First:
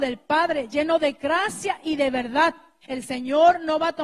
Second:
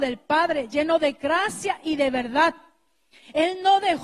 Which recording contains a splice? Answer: first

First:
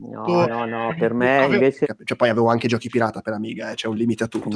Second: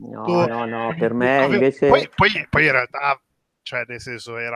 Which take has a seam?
first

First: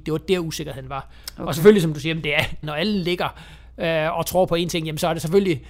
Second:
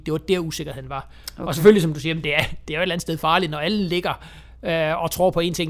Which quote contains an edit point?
first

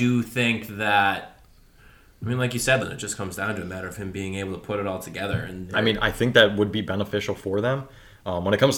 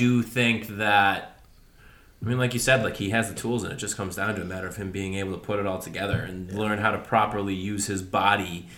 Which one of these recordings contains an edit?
first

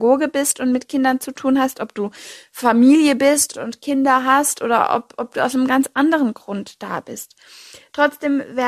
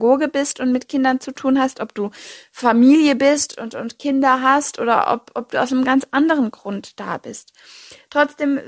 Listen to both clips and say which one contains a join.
first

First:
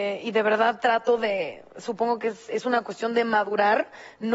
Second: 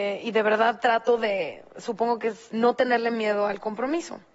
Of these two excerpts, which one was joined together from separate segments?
second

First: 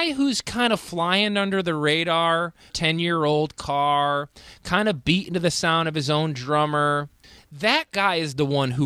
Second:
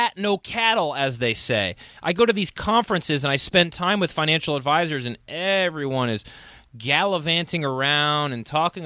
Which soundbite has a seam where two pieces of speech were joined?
first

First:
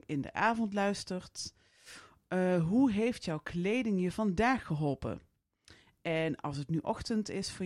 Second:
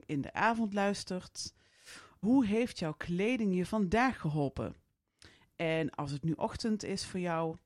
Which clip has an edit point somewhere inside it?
second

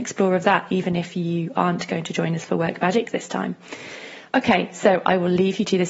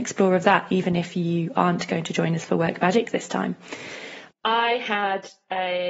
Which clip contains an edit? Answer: second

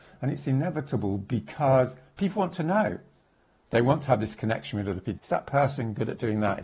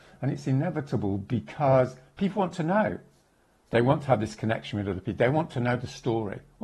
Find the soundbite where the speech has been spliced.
first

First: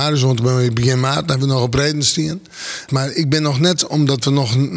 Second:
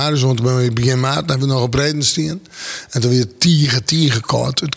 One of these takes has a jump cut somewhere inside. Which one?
first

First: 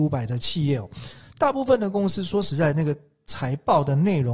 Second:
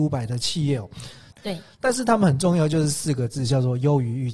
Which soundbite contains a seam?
second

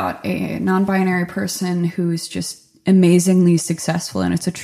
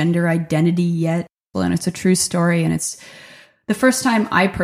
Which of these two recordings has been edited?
second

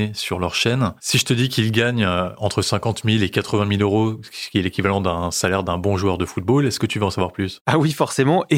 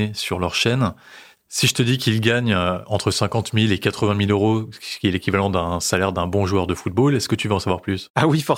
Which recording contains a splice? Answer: first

